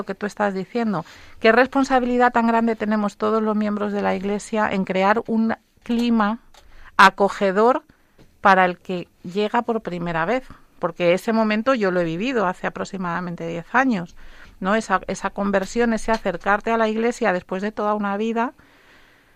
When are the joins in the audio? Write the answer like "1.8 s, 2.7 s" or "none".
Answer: none